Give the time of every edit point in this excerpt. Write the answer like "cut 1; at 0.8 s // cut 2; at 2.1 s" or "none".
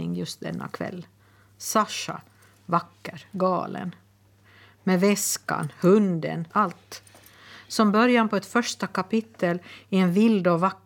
cut 1; at 6.5 s